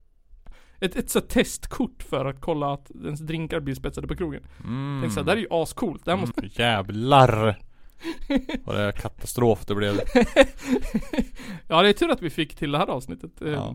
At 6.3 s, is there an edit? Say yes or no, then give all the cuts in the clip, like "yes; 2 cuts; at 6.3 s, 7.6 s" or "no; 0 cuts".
yes; 1 cut; at 6.3 s